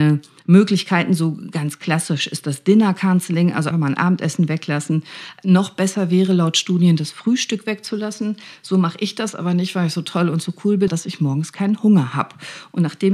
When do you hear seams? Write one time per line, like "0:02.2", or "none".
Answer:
0:03.7
0:10.9